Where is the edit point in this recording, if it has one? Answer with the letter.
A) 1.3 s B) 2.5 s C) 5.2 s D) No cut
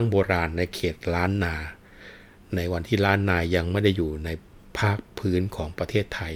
D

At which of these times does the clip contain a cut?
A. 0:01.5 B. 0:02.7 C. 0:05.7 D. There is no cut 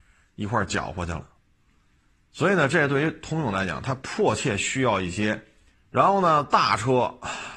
C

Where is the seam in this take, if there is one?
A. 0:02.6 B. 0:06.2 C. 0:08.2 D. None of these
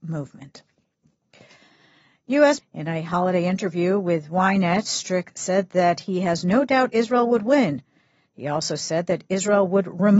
A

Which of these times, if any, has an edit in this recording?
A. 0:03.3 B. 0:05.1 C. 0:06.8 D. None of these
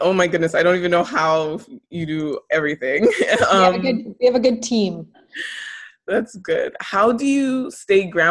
B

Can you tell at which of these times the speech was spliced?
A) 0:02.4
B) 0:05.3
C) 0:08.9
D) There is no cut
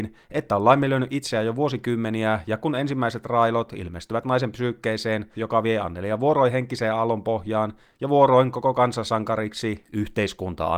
B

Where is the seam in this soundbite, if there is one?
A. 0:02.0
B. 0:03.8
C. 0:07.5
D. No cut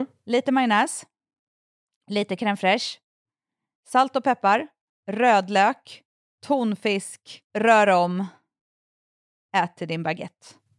C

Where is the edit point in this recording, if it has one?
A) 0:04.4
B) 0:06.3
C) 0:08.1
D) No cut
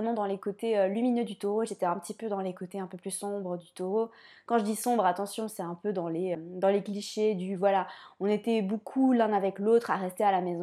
B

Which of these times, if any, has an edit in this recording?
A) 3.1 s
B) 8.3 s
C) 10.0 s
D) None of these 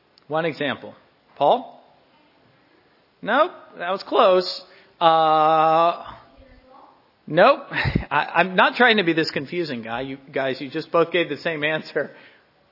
D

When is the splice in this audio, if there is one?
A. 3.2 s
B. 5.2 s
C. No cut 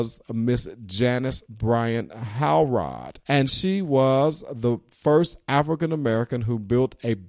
A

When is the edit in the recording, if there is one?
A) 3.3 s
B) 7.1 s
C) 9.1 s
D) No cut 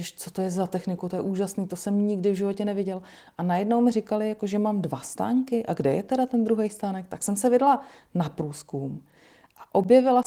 D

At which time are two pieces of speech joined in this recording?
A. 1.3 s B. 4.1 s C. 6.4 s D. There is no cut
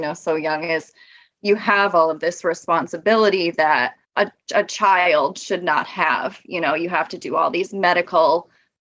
B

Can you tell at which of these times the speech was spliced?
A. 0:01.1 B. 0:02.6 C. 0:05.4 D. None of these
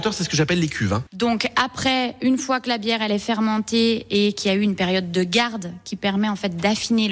A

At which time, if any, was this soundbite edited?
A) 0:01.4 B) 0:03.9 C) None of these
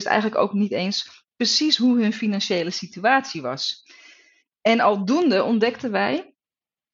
C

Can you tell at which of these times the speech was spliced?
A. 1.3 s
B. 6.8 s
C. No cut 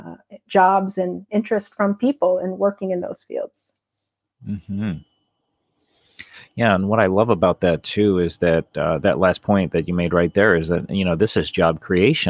A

